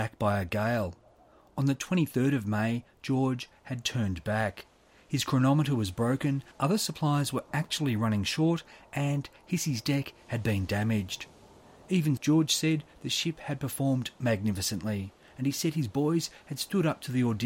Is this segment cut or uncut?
cut